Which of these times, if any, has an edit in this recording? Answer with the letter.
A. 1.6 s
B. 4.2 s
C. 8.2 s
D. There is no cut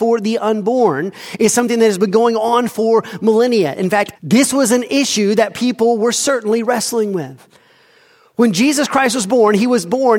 B